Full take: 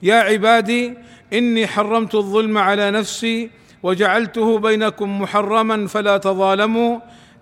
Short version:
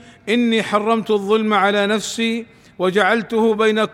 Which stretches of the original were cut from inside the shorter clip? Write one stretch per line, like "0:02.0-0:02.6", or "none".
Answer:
none